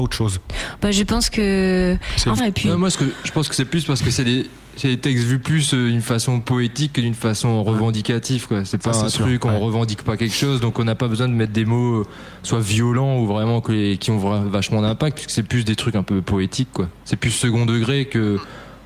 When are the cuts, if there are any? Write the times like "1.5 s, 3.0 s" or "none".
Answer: 2.4 s